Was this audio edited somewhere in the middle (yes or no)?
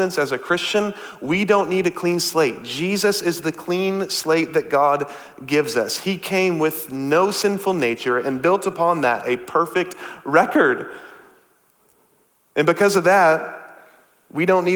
no